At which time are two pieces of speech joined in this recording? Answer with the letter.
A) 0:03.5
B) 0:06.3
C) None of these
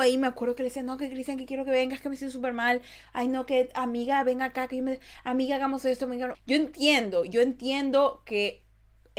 B